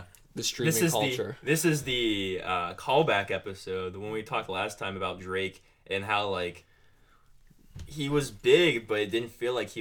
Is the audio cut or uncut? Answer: uncut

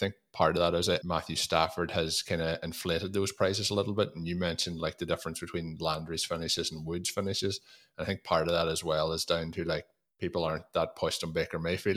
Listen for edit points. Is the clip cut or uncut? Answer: cut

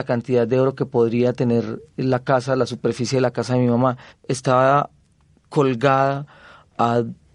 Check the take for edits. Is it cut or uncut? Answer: cut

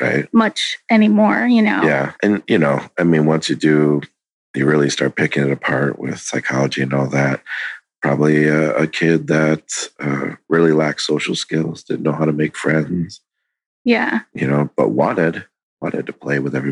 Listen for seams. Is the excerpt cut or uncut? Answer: uncut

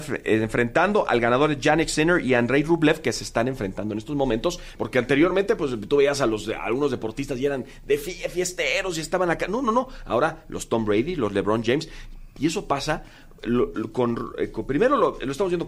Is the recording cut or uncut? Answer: cut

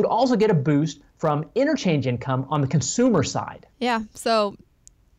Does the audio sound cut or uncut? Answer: cut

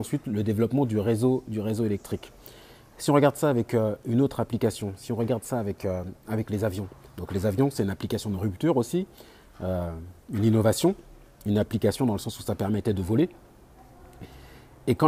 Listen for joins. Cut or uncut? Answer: uncut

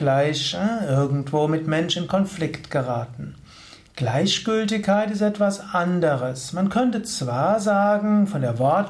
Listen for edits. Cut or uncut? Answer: cut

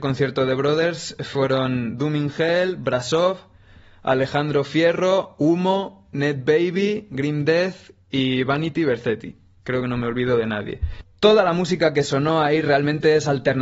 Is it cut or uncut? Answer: uncut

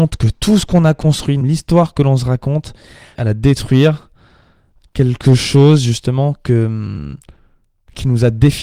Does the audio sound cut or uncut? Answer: cut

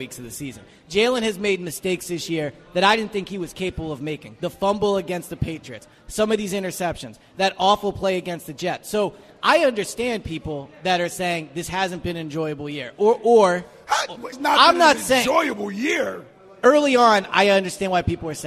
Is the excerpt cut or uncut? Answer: cut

